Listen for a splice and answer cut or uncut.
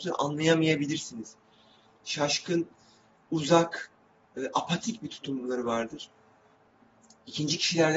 uncut